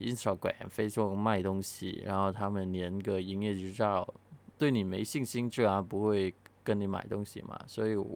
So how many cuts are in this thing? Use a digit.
1